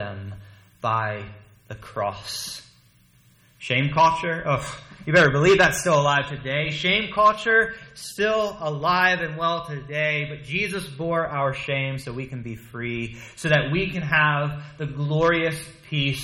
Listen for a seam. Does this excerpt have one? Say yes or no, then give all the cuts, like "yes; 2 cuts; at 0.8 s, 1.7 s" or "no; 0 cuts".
no; 0 cuts